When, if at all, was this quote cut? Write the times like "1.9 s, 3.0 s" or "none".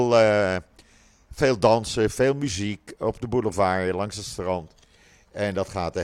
none

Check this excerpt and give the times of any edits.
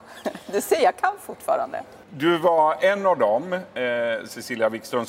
none

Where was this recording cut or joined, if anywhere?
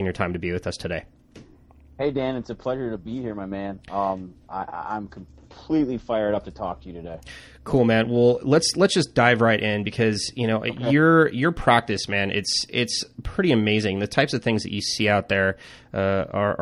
none

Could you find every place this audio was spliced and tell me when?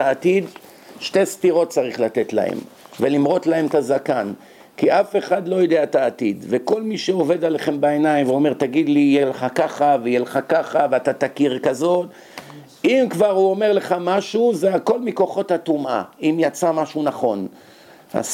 none

